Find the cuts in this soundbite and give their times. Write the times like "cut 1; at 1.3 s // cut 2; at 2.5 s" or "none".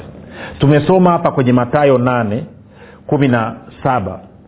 none